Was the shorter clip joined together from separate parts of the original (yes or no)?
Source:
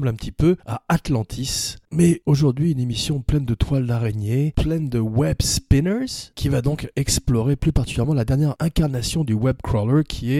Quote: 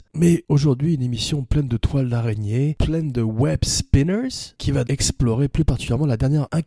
yes